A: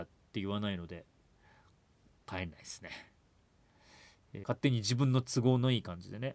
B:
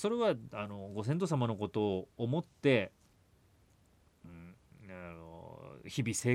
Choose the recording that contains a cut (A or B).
A